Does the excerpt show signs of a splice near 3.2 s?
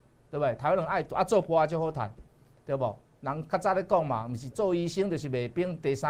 no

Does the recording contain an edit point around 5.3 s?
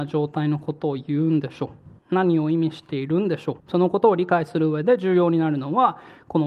no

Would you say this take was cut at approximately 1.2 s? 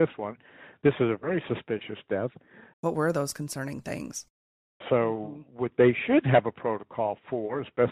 no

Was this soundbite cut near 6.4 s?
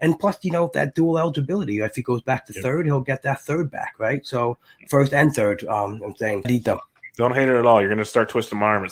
yes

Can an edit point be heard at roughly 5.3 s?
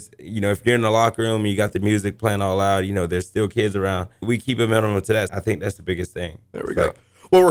yes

